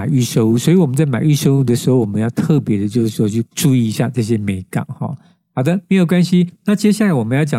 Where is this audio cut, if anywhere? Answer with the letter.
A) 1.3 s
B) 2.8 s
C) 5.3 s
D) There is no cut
D